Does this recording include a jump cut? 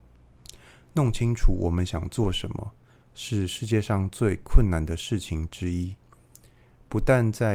no; 0 cuts

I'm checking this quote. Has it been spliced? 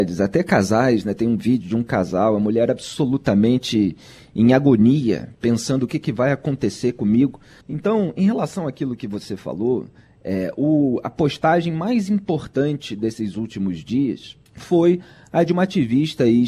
yes; 2 cuts; at 7.6 s, 14.5 s

